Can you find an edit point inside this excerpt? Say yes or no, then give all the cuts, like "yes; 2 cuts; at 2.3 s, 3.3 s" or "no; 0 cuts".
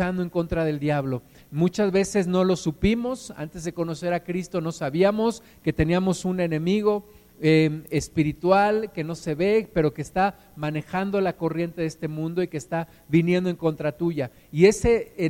no; 0 cuts